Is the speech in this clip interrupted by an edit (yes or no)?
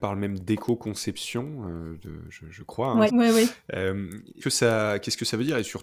yes